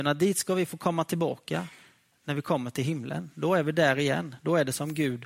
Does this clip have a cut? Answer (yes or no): no